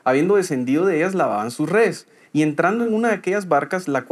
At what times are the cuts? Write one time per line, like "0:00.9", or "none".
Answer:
none